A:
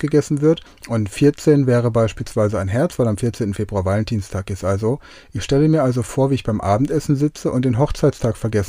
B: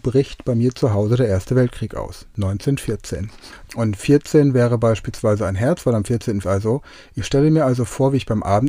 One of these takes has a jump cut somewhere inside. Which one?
B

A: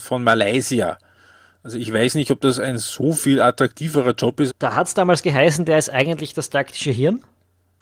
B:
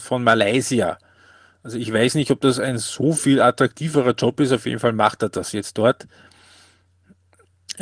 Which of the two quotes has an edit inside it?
A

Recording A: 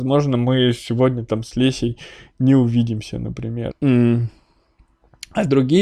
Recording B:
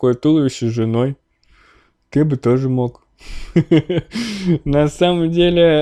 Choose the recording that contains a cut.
A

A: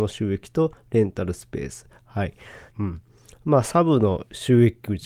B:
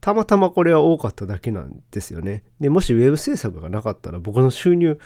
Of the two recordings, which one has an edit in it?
A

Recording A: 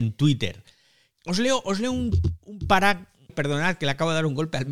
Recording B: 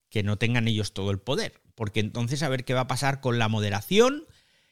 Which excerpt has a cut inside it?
A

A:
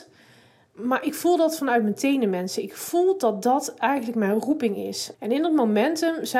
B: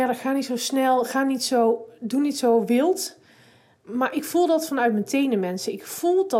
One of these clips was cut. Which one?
A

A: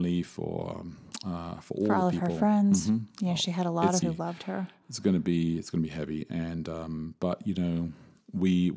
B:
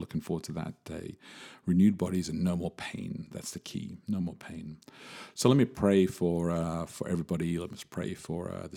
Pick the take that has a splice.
A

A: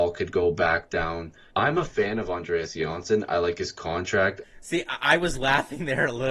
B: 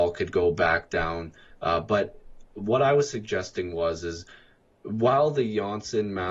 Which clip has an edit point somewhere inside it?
A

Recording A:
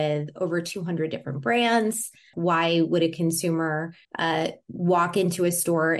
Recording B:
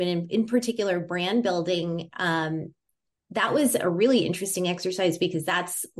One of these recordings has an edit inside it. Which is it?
A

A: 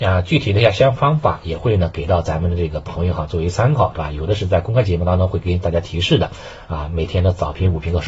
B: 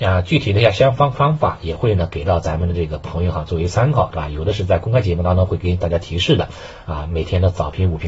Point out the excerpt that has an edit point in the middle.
A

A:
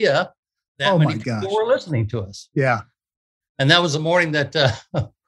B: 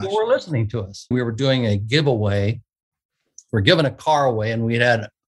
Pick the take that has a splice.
B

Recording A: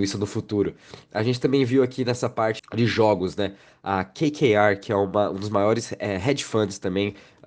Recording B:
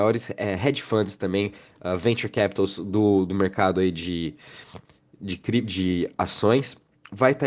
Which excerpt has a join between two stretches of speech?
A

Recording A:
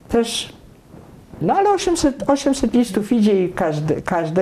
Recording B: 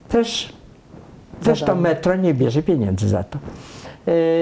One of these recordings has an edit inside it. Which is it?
A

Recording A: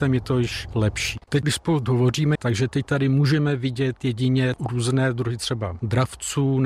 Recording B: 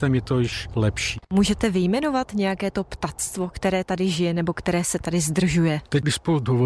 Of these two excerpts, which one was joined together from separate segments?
A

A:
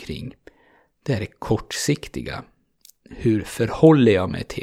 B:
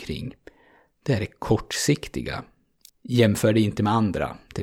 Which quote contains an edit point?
B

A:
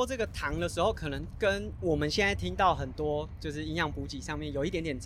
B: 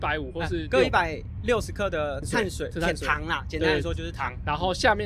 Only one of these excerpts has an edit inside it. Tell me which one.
B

